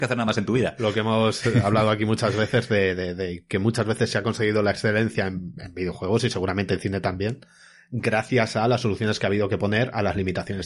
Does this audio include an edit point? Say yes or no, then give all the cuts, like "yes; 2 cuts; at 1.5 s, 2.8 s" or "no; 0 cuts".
no; 0 cuts